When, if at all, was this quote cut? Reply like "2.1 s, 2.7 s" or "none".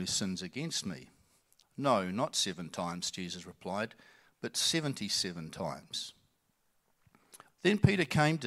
1.6 s, 7.5 s